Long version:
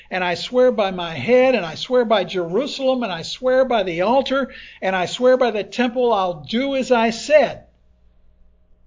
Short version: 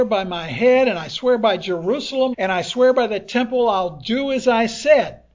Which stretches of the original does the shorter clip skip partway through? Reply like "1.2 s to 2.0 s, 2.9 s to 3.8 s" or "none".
3.0 s to 4.8 s